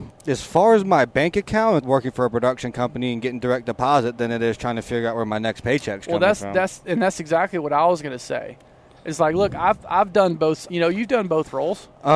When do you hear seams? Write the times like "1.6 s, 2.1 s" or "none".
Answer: 1.8 s, 10.7 s